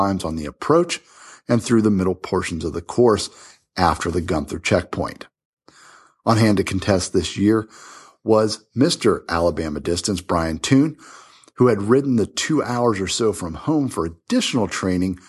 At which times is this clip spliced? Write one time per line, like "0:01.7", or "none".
none